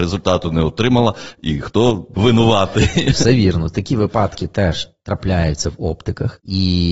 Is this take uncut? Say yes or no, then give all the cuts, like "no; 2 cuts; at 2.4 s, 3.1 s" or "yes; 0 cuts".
no; 1 cut; at 2.1 s